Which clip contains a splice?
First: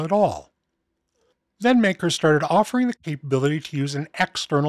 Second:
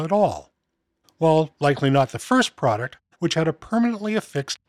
second; 2 cuts; at 1.0 s, 3.1 s

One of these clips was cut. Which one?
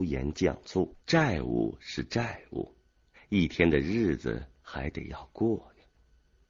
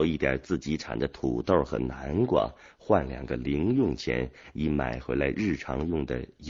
first; 1 cut; at 1.0 s

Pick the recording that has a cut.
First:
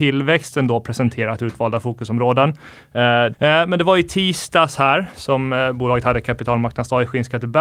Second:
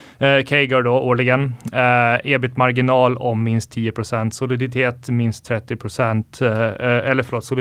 first; 1 cut; at 3.3 s

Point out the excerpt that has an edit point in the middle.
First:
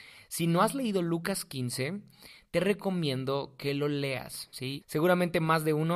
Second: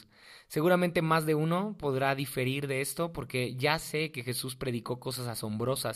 first; 1 cut; at 4.8 s

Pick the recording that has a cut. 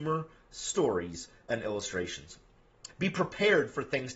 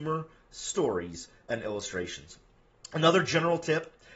first; 1 cut; at 2.9 s

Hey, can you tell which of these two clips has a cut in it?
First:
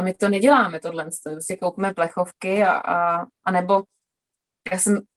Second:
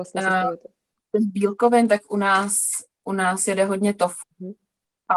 second; 1 cut; at 4.2 s

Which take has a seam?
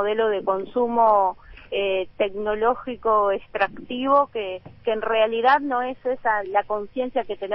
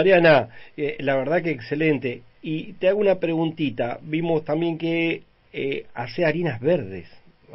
first; 2 cuts; at 4.8 s, 6.4 s

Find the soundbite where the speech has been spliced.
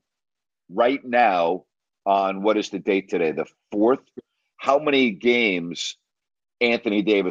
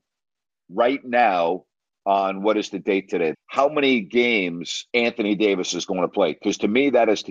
second; 2 cuts; at 3.3 s, 4.9 s

